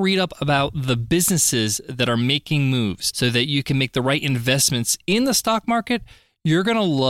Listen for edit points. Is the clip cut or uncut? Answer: uncut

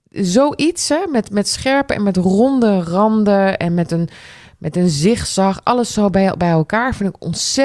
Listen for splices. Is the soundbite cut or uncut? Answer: uncut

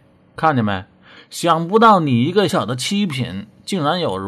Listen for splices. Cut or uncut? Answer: cut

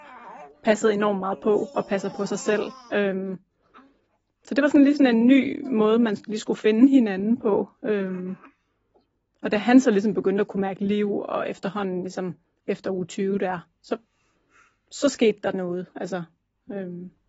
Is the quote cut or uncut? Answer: uncut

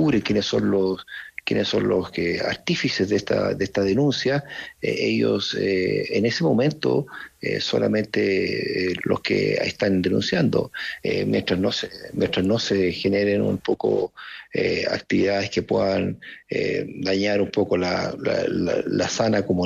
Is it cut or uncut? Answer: cut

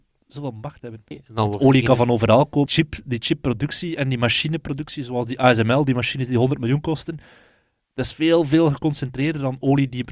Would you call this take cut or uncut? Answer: cut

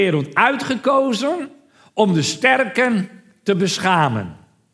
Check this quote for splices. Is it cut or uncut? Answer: uncut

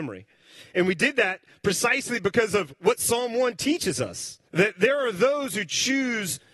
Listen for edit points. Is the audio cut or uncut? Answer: cut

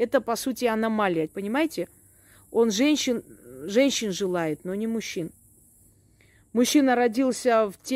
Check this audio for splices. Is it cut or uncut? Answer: cut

